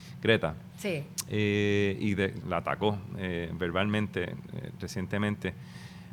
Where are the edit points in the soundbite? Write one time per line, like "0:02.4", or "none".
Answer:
0:02.4